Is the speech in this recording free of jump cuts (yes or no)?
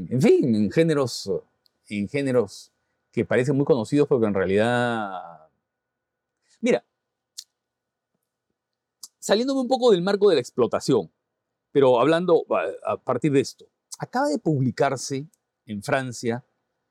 yes